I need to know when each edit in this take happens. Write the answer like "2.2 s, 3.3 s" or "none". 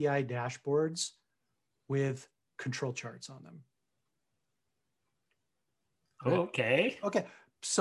none

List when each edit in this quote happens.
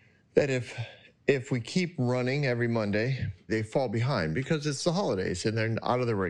3.5 s

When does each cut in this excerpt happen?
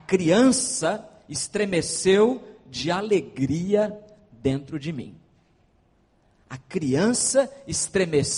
none

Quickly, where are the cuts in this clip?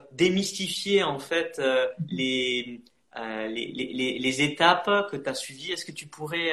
none

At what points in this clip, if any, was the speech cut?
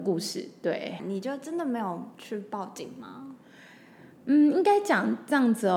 1.0 s

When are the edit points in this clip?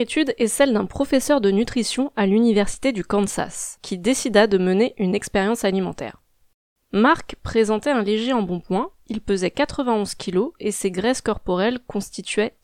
3.8 s

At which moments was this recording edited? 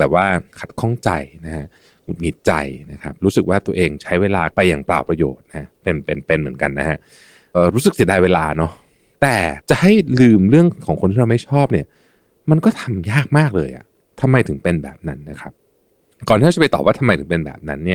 7.5 s

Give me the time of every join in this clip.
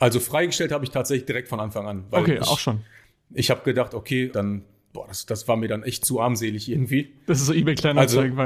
4.3 s

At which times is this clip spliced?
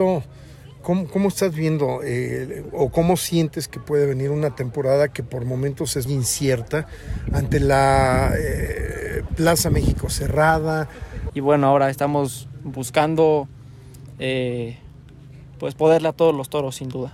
6.1 s, 11.3 s

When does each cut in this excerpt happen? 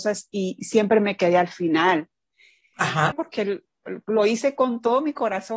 3.1 s

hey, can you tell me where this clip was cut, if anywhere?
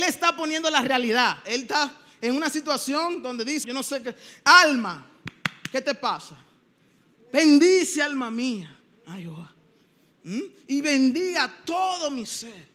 3.6 s

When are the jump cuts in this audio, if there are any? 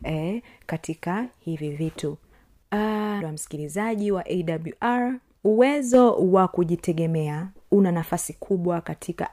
3.2 s

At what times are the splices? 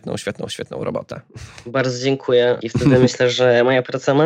2.6 s

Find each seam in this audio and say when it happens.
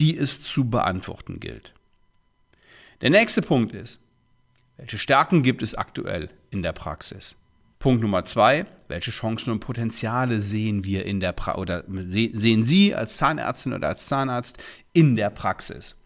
7.7 s

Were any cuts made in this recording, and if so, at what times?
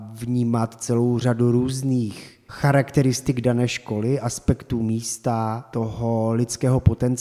none

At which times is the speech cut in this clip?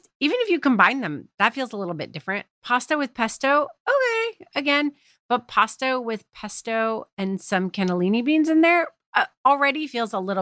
none

